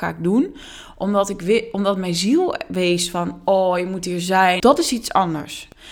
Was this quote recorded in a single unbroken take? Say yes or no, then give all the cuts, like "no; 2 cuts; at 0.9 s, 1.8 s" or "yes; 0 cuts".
no; 1 cut; at 4.6 s